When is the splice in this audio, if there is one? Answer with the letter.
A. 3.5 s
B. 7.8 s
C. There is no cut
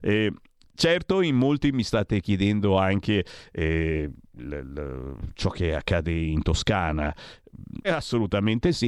B